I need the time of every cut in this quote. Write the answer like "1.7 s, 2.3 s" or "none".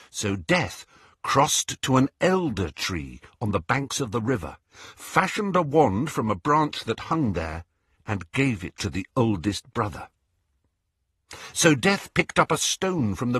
11.5 s

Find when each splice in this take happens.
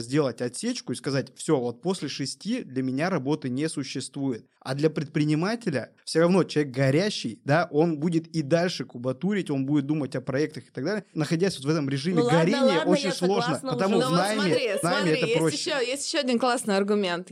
none

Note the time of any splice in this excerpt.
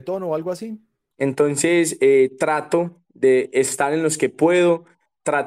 1.1 s

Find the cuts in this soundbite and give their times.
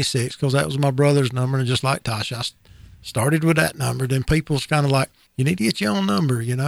none

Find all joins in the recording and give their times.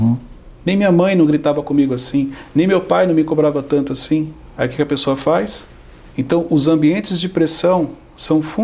6.1 s

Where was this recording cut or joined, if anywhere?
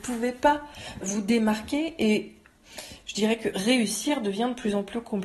1.0 s

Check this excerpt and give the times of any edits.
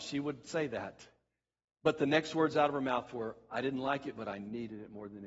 none

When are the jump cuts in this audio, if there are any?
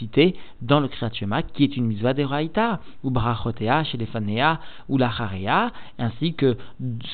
none

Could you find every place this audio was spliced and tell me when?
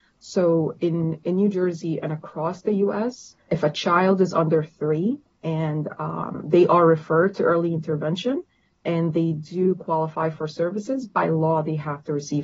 3.5 s

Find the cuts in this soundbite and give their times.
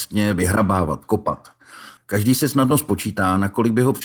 2.0 s

